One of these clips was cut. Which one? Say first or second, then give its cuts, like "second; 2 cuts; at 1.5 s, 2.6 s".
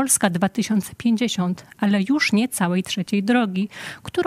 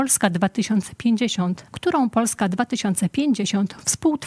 second; 1 cut; at 1.7 s